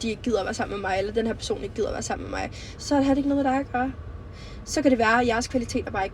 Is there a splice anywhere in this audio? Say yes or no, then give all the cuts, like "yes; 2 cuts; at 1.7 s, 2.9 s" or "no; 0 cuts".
yes; 1 cut; at 2.8 s